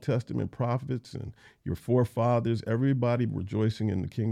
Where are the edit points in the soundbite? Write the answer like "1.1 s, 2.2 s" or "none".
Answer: none

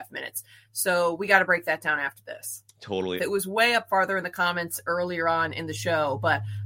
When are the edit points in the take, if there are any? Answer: 3.2 s

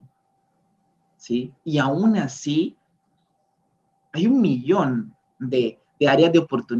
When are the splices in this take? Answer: none

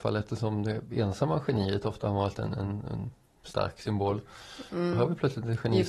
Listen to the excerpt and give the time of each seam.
none

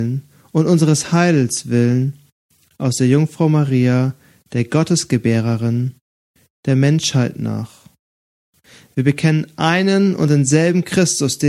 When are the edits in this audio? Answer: none

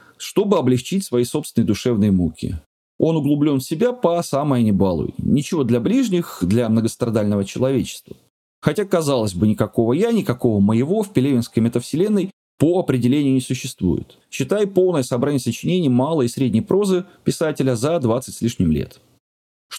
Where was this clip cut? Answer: 14.2 s

